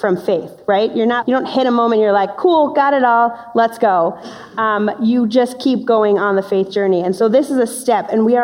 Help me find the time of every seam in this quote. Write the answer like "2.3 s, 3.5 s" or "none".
1.2 s